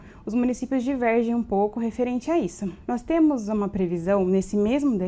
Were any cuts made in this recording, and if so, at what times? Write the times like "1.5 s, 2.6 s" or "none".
2.8 s